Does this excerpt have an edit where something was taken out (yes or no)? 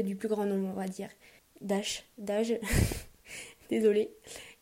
yes